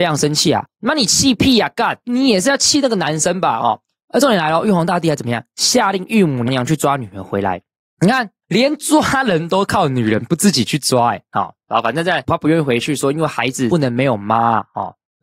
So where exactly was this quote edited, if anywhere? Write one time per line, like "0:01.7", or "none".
0:06.5